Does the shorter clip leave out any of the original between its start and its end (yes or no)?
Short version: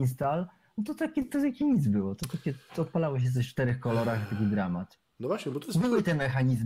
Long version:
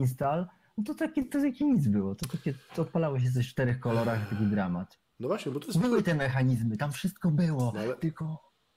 no